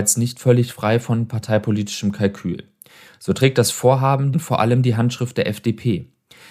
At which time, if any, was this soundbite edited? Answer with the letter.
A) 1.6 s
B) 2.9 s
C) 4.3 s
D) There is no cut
C